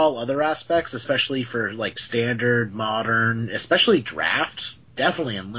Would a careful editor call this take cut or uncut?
uncut